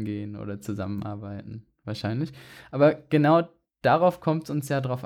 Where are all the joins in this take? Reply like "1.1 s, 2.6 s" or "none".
none

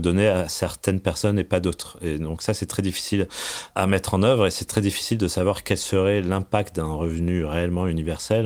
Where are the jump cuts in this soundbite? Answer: none

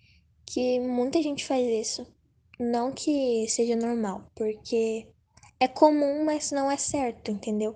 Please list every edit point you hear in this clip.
none

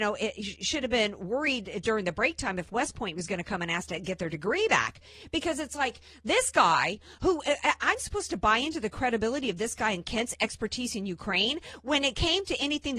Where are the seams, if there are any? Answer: none

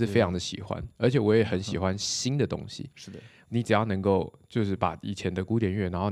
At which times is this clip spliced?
3.4 s

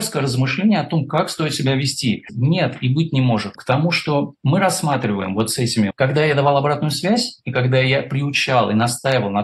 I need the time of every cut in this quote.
2.3 s, 3.6 s, 5.9 s

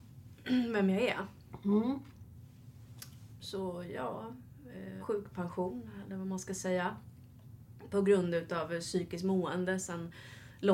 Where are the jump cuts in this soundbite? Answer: 3.4 s, 5.0 s

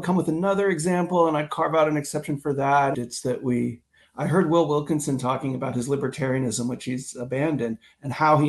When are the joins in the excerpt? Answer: 2.9 s

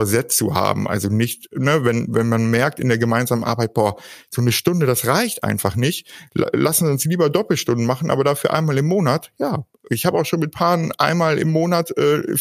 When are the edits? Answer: none

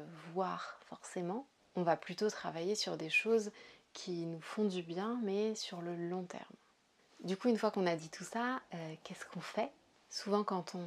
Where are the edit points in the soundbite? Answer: 7.1 s

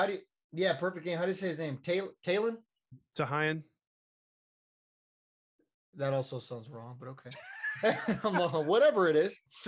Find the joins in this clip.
none

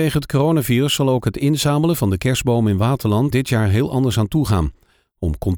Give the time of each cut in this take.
3.3 s

